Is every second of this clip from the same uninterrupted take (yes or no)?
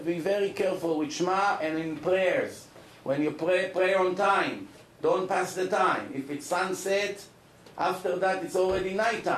yes